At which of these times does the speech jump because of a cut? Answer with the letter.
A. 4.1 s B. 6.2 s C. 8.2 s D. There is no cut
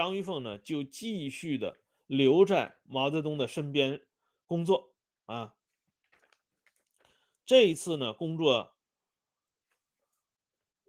D